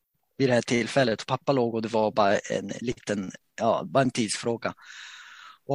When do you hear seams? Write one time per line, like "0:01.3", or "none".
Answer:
none